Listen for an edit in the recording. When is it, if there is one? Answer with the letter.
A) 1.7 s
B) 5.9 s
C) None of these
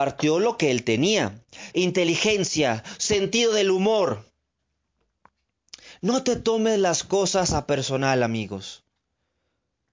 A